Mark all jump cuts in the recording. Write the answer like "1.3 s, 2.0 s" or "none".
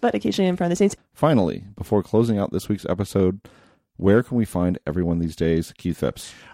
1.0 s